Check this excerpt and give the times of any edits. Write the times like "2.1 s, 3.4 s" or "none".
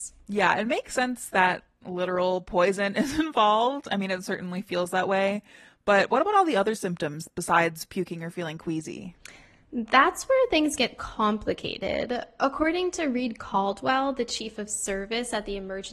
none